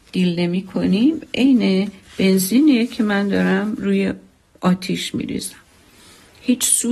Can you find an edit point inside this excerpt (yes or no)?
no